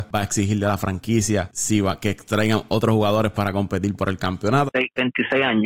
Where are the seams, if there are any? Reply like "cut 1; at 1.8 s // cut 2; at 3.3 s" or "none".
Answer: cut 1; at 4.7 s